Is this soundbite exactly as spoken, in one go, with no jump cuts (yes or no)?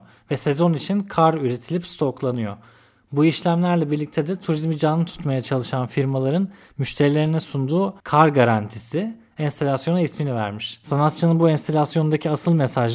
yes